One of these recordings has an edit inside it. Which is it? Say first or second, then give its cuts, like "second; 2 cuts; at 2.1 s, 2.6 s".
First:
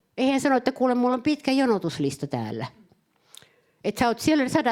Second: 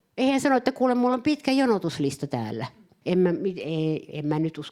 second; 1 cut; at 3.0 s